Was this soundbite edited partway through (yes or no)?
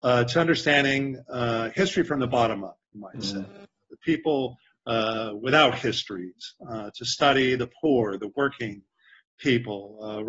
no